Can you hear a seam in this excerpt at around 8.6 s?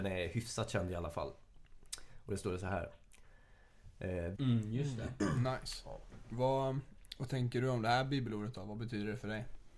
no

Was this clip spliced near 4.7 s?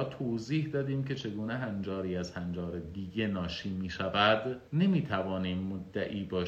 yes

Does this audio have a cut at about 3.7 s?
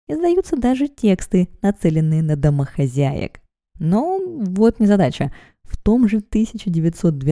yes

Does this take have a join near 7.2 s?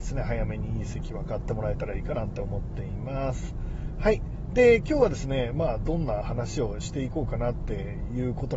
no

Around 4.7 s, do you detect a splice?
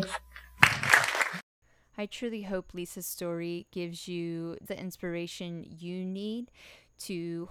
yes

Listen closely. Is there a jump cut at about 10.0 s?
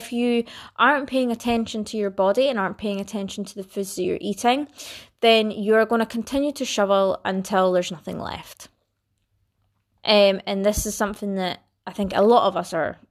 yes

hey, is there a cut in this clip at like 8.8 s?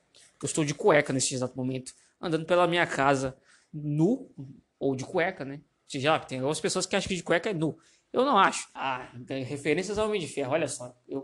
yes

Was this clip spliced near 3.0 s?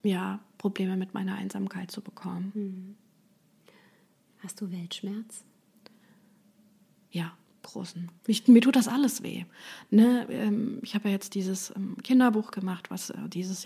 no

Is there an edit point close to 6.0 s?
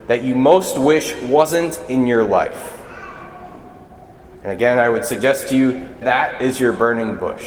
yes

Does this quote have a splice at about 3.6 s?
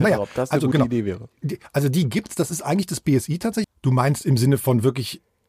yes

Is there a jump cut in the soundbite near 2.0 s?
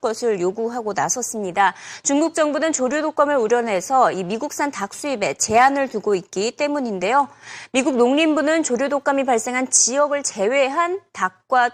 no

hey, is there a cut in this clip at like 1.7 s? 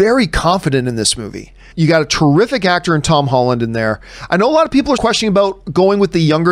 yes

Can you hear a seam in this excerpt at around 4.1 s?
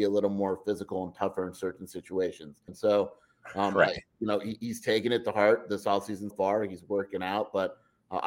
no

